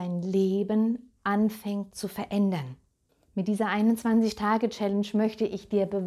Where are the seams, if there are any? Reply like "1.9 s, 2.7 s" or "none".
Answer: none